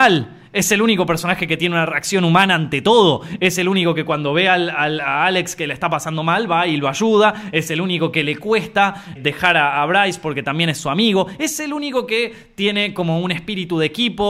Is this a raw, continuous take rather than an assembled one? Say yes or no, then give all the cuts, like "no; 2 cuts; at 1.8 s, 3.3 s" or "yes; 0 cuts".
no; 1 cut; at 9.2 s